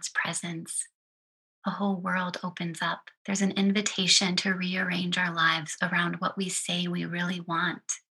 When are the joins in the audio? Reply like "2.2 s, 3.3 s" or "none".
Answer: 3.1 s